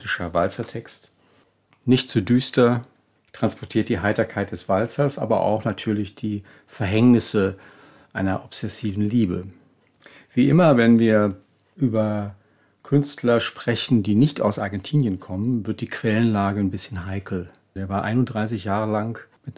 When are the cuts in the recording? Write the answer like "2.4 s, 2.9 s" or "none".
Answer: 17.8 s

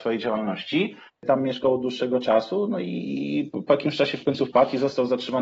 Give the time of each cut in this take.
1.1 s

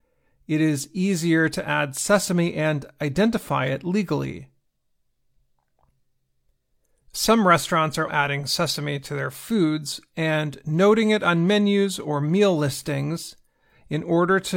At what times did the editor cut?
8.1 s

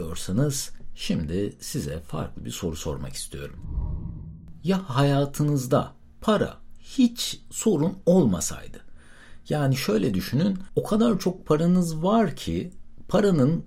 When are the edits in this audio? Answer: none

